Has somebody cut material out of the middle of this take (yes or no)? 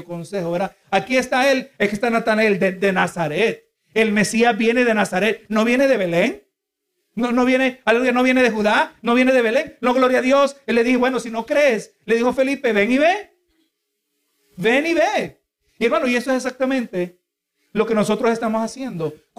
no